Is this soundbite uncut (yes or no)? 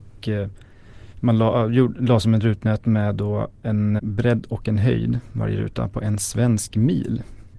no